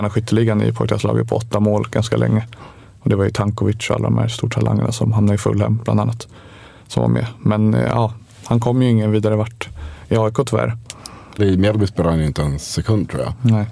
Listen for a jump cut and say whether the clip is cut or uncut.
cut